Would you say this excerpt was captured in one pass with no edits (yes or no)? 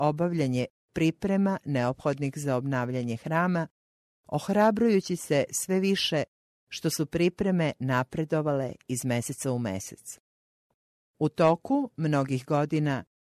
yes